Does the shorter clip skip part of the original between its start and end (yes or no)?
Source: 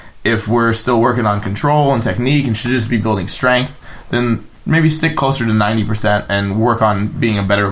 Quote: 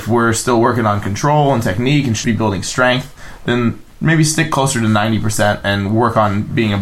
yes